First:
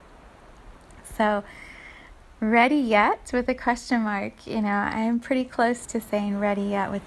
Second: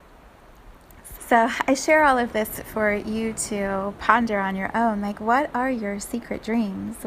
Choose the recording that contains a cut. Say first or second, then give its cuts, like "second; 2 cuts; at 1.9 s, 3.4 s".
second; 1 cut; at 1.2 s